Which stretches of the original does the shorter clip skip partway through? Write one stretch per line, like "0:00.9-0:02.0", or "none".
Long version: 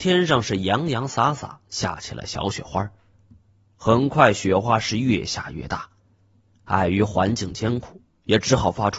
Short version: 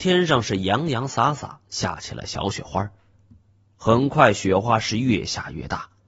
none